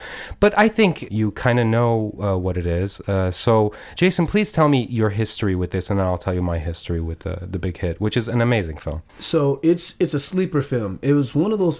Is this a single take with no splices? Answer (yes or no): no